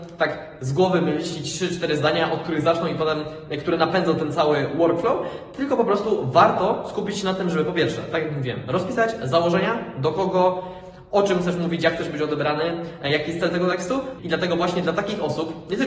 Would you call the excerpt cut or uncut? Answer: cut